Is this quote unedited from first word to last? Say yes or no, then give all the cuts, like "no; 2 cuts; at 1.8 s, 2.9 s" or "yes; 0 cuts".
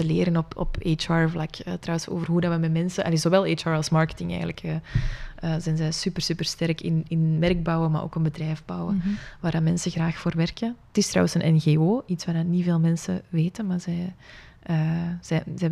yes; 0 cuts